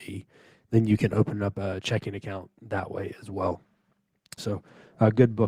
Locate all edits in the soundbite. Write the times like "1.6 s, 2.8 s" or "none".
4.4 s